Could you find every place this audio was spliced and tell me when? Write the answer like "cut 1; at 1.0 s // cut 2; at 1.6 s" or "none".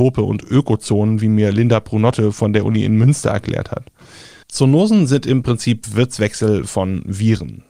cut 1; at 4.4 s